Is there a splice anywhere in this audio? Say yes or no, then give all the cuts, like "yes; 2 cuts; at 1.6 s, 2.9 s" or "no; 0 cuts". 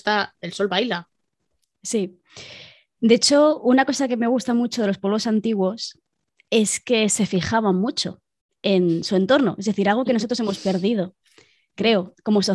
no; 0 cuts